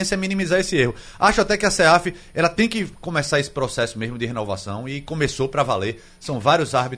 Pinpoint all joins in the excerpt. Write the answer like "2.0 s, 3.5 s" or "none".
none